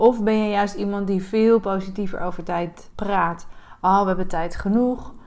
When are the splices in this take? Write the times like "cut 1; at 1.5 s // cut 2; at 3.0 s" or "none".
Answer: cut 1; at 2.9 s